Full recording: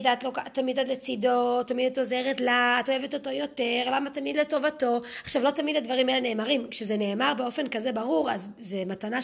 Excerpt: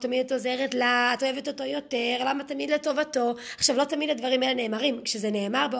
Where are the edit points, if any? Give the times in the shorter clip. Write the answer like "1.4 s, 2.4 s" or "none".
none